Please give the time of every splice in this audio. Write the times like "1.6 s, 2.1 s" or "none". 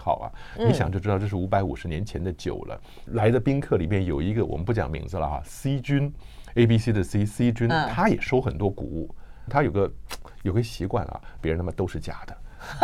3.1 s, 9.5 s, 11.4 s